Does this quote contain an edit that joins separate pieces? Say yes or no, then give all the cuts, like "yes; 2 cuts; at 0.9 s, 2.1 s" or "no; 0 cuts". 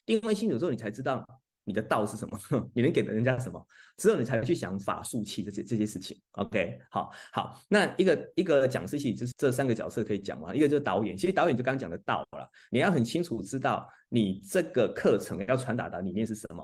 yes; 1 cut; at 9.3 s